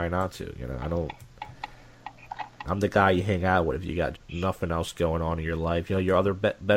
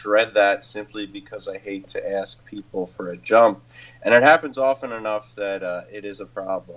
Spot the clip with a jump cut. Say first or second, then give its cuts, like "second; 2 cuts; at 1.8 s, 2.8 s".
first; 2 cuts; at 2.6 s, 4.1 s